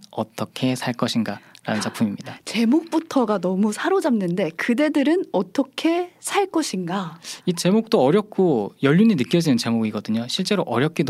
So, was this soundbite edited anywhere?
no; 0 cuts

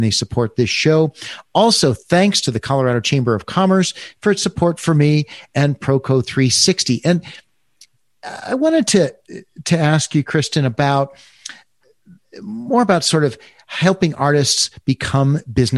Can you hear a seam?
no; 0 cuts

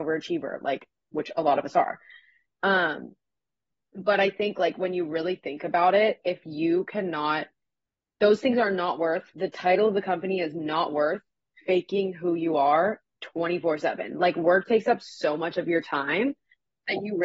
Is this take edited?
no; 0 cuts

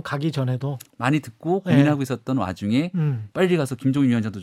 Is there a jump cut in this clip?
yes; 1 cut; at 3.3 s

